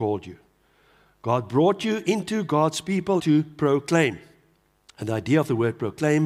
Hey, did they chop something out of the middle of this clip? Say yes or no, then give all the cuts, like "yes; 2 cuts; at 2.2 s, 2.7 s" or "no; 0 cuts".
yes; 1 cut; at 3.2 s